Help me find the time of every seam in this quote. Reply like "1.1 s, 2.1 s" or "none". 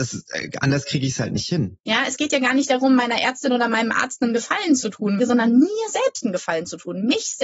1.8 s, 5.2 s